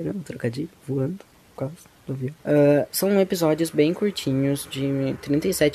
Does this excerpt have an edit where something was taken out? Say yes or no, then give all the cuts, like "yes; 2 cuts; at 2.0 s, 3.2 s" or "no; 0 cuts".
yes; 1 cut; at 2.4 s